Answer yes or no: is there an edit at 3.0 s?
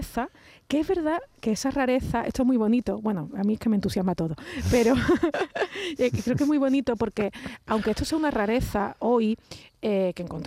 no